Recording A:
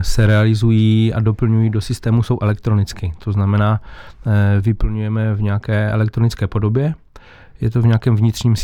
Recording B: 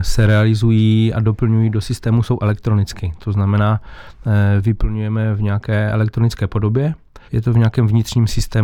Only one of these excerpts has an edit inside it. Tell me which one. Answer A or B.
B